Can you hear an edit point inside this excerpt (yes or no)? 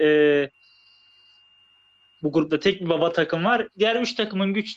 yes